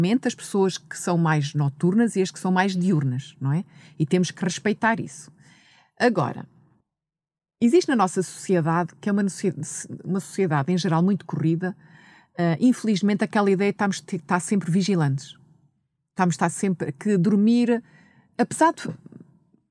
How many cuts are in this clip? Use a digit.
0